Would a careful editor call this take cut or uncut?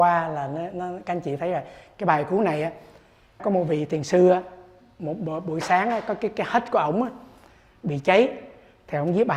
cut